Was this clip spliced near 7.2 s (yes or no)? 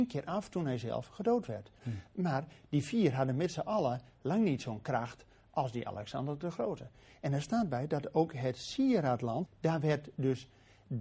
no